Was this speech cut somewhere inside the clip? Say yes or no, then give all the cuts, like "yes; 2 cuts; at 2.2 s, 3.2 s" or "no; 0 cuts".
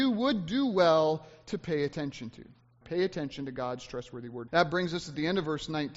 yes; 2 cuts; at 2.8 s, 4.5 s